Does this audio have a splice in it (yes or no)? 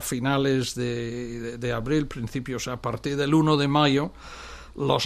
no